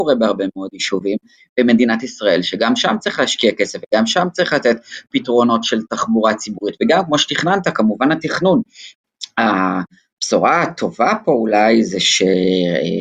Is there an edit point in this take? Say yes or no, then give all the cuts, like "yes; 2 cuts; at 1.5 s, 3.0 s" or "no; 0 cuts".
yes; 1 cut; at 1.4 s